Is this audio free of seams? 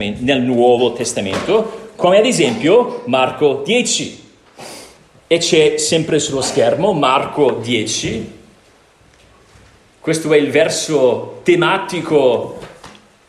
yes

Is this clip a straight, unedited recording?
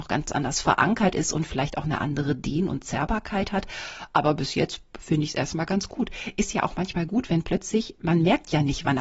yes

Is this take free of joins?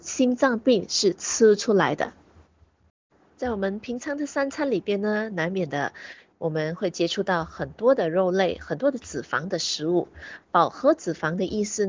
yes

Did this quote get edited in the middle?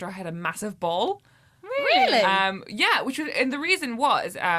no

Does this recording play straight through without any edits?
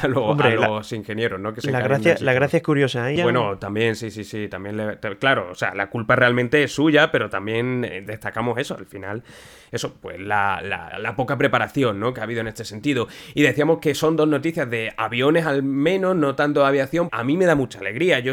no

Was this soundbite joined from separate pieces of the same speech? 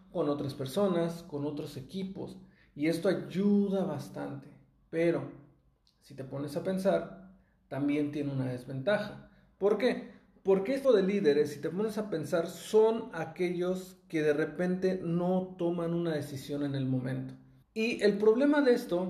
yes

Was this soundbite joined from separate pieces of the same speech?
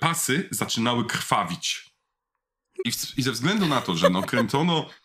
yes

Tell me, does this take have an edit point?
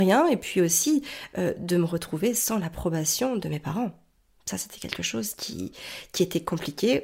no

